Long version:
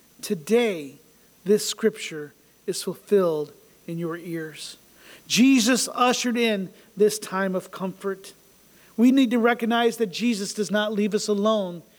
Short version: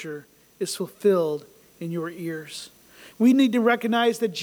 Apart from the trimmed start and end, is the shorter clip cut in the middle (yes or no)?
yes